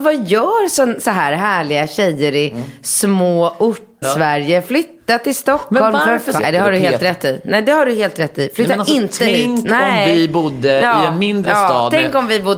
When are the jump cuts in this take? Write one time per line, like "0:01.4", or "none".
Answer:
0:04.0
0:06.4